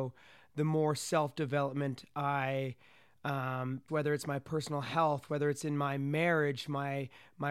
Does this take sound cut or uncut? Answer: cut